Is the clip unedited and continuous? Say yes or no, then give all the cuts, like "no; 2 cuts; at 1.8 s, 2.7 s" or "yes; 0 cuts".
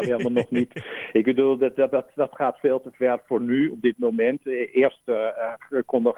yes; 0 cuts